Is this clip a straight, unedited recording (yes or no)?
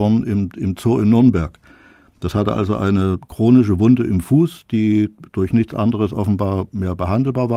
yes